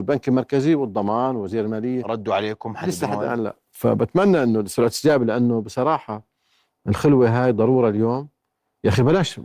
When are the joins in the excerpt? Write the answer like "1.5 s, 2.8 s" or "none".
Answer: none